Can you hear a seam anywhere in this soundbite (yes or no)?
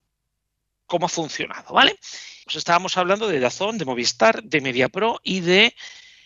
yes